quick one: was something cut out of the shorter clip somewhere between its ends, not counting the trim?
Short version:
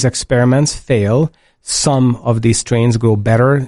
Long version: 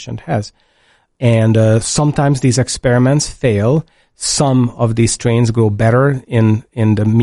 no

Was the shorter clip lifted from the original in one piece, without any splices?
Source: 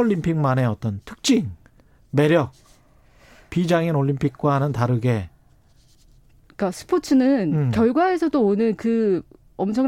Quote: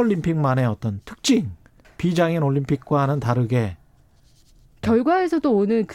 no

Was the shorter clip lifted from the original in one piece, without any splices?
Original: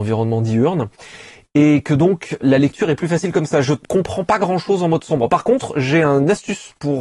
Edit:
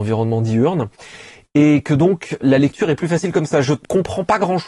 yes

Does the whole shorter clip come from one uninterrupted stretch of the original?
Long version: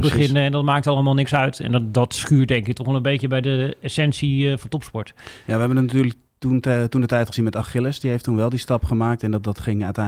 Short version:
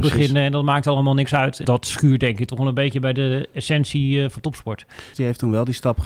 no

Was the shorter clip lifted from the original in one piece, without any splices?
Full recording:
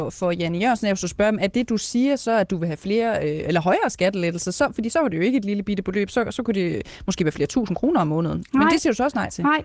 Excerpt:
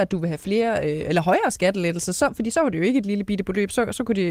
yes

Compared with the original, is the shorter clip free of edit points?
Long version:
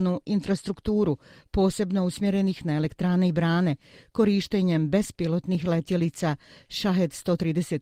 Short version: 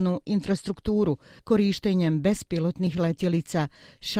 no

